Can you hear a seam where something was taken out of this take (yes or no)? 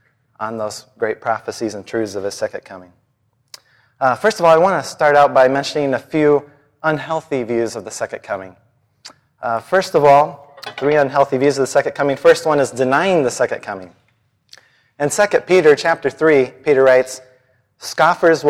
no